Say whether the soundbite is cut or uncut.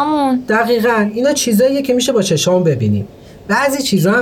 uncut